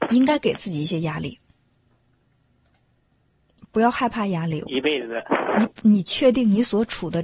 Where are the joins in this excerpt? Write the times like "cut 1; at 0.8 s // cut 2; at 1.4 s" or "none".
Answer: cut 1; at 4.6 s